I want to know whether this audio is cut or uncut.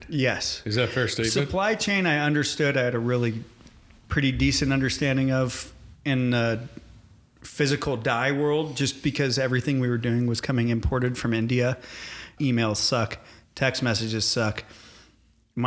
cut